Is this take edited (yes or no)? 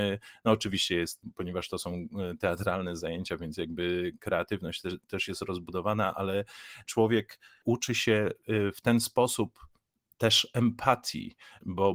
no